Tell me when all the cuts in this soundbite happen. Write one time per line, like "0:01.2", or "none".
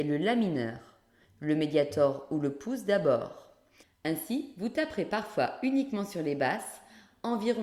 0:01.2
0:03.8